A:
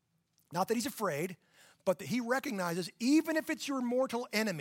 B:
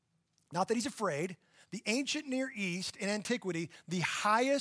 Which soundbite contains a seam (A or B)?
B